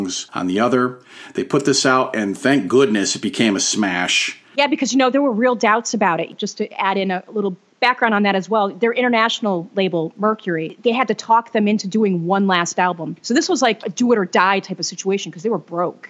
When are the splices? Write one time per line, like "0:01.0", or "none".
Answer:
none